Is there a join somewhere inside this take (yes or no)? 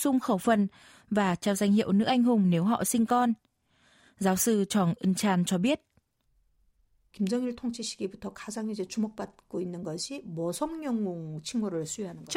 no